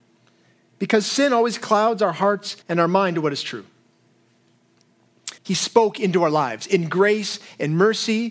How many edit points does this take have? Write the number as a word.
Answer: two